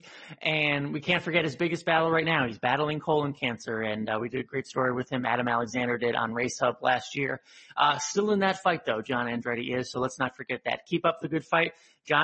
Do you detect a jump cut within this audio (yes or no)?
no